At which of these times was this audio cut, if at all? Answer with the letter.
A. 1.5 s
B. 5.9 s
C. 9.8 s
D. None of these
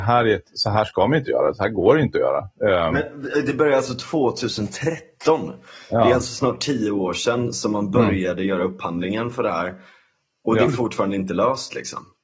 D